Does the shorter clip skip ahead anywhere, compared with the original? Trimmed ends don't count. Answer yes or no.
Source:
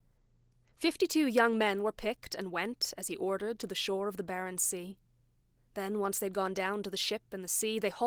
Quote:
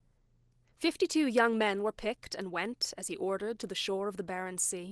no